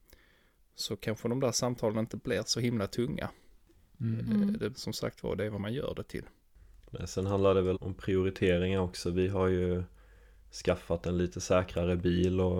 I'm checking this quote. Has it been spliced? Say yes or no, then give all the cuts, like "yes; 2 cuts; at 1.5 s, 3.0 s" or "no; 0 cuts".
yes; 2 cuts; at 4.7 s, 7.7 s